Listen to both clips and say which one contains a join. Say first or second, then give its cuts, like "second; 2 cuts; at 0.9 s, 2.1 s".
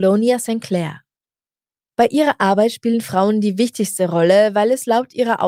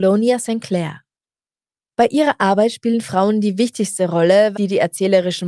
second; 1 cut; at 4.5 s